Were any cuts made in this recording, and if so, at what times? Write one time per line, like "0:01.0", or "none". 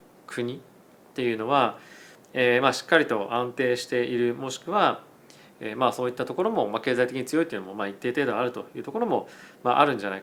0:02.2